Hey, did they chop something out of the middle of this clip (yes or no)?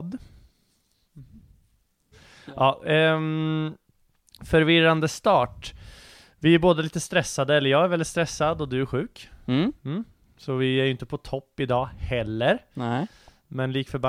yes